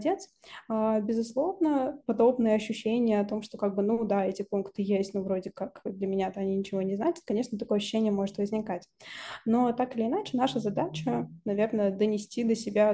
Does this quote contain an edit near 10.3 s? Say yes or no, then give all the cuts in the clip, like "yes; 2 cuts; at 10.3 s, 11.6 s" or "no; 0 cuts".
no; 1 cut; at 2.0 s